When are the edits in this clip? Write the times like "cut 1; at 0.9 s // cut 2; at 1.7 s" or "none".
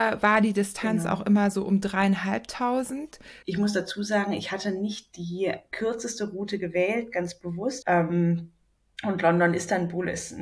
cut 1; at 3.4 s // cut 2; at 7.8 s